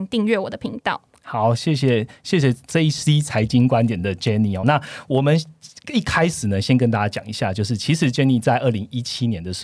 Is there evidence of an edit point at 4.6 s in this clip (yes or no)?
no